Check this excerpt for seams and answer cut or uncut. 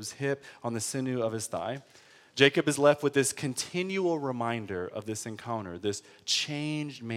uncut